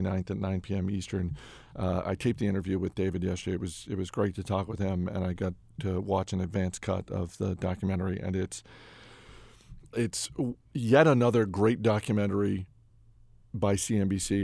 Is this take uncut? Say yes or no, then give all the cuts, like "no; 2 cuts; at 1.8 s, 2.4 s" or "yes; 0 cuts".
no; 1 cut; at 9.9 s